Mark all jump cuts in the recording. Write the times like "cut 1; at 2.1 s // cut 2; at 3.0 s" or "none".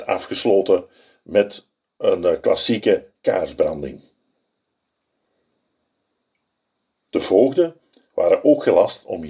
none